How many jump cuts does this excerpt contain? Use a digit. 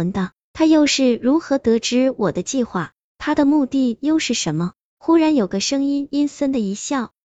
1